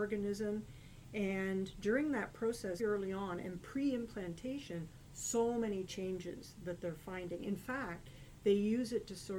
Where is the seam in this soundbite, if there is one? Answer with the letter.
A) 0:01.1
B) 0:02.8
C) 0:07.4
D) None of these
B